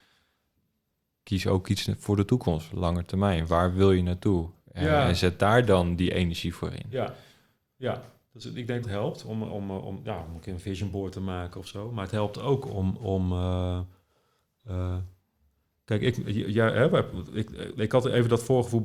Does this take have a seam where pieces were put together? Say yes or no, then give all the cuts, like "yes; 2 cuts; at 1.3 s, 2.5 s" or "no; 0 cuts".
yes; 1 cut; at 8.8 s